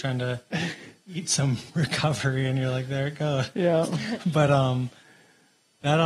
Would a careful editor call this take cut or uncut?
uncut